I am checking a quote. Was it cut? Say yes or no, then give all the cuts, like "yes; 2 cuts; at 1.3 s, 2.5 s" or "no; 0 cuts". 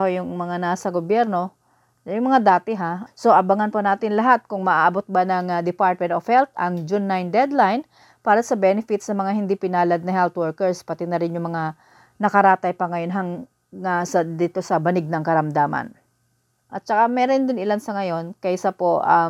yes; 2 cuts; at 3.1 s, 16.7 s